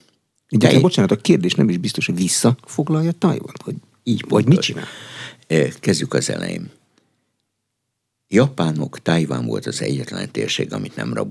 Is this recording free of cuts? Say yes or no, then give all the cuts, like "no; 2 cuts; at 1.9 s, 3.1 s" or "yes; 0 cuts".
yes; 0 cuts